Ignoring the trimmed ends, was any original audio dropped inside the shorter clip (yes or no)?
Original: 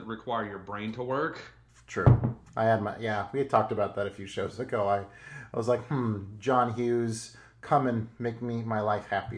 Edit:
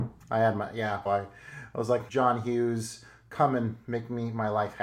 yes